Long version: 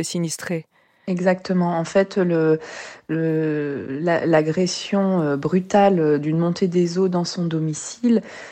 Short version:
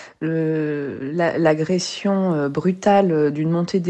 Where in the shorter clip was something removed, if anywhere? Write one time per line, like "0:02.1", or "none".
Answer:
none